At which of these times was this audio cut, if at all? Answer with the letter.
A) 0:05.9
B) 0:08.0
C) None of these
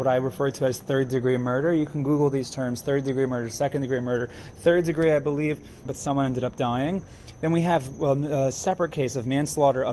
A